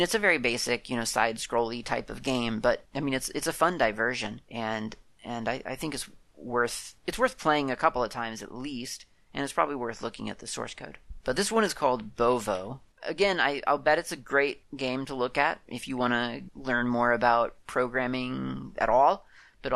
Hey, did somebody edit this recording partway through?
yes; 2 cuts; at 11.2 s, 12.9 s

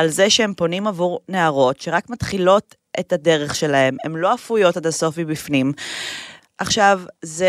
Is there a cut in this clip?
yes; 1 cut; at 6.4 s

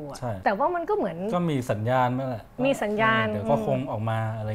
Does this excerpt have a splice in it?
no; 0 cuts

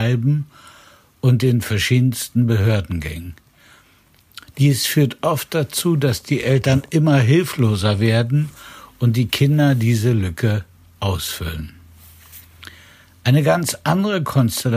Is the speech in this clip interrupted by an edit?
no; 0 cuts

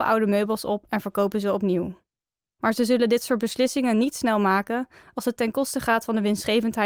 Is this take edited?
no; 0 cuts

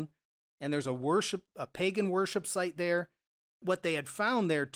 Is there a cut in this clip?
yes; 1 cut; at 3.4 s

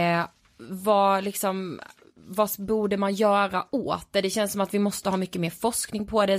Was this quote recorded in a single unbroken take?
yes; 0 cuts

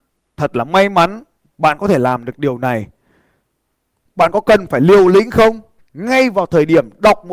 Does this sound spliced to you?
yes; 2 cuts; at 4.0 s, 5.8 s

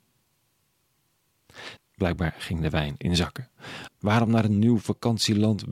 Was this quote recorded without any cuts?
no; 2 cuts; at 1.8 s, 3.9 s

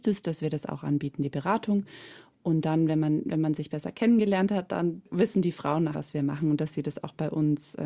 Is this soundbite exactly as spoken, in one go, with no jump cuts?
no; 1 cut; at 5.9 s

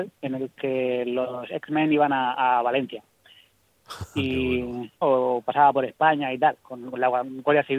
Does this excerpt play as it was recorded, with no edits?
no; 1 cut; at 5.0 s

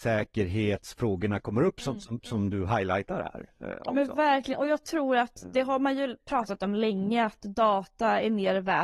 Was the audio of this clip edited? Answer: no; 0 cuts

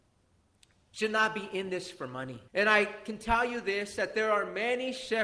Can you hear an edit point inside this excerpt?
yes; 1 cut; at 2.5 s

